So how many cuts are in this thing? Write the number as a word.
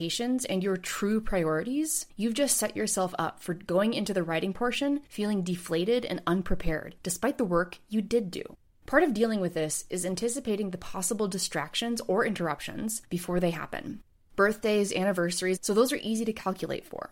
one